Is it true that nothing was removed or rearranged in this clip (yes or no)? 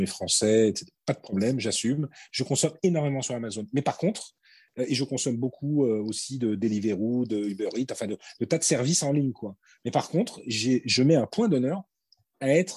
yes